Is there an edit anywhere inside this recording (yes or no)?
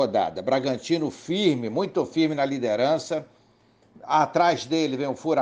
no